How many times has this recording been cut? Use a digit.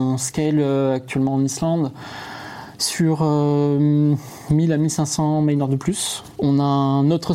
1